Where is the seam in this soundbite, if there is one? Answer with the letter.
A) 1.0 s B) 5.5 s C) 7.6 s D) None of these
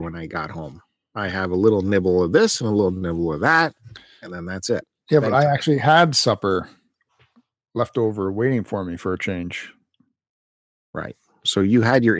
D